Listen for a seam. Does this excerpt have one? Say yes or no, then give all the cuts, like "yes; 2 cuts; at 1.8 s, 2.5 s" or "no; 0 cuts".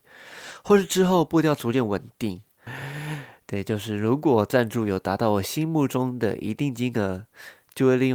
yes; 1 cut; at 2.7 s